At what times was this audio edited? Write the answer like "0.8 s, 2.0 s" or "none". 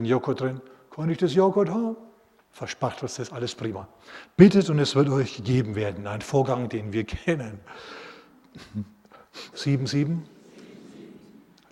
2.4 s, 9.5 s